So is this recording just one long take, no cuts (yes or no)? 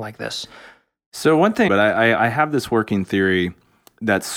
no